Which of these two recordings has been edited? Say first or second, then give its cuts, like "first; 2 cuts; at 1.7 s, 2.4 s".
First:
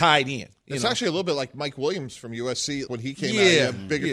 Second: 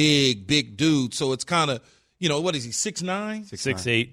first; 1 cut; at 2.9 s